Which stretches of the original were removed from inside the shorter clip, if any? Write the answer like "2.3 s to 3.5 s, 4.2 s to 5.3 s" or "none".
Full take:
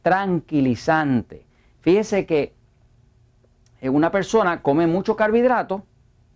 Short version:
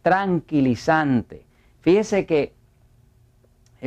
none